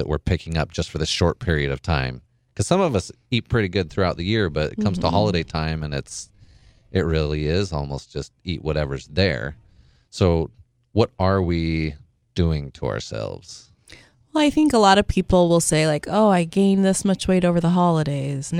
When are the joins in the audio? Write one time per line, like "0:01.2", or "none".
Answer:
none